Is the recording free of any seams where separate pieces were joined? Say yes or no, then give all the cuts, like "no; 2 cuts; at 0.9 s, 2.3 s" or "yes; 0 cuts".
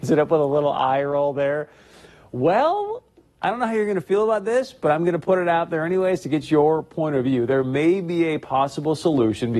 yes; 0 cuts